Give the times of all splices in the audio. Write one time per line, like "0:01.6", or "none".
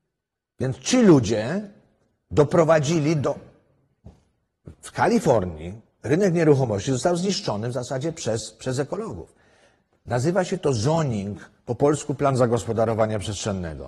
none